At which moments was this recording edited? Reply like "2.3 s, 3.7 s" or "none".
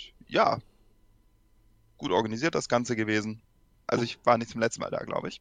3.9 s